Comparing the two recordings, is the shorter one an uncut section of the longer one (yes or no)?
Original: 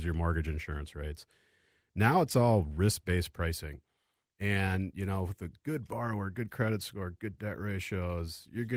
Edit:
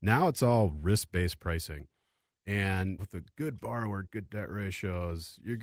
no